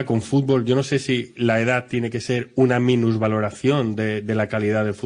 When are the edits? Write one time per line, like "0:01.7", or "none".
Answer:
none